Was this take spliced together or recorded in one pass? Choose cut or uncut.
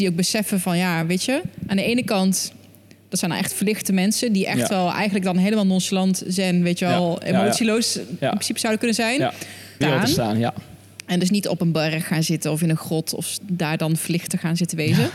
cut